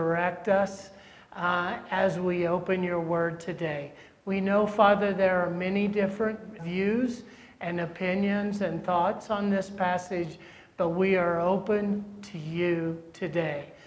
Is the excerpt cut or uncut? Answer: cut